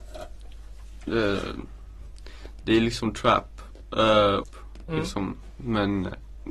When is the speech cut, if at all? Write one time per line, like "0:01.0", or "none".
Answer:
0:04.4